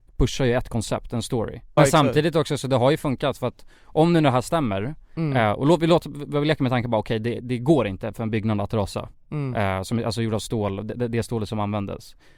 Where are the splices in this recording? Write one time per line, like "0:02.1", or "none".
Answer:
0:01.8